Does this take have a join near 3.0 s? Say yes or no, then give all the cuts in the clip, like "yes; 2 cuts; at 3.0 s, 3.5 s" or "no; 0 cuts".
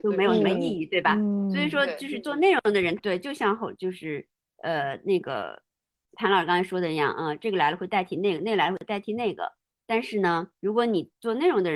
yes; 2 cuts; at 3.0 s, 10.6 s